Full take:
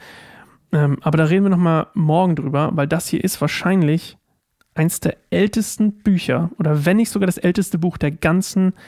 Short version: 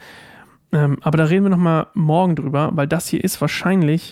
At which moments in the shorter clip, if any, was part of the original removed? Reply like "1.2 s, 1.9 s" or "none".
none